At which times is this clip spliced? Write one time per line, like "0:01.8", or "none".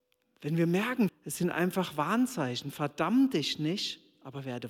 0:01.1